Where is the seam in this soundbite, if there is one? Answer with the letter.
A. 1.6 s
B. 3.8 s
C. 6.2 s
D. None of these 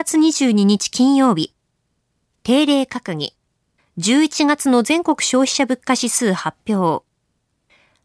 B